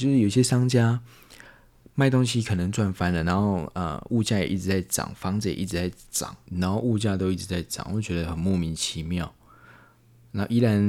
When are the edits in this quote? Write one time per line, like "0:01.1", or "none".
0:06.5